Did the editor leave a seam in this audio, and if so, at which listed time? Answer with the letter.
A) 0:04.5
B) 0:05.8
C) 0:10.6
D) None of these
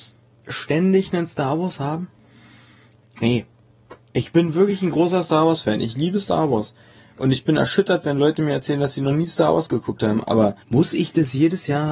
C